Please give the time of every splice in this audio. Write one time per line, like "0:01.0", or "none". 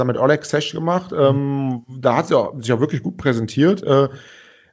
none